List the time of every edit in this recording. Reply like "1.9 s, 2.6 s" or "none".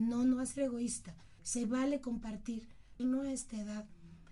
1.4 s, 3.0 s